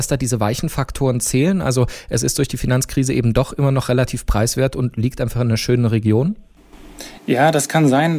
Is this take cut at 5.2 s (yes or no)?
no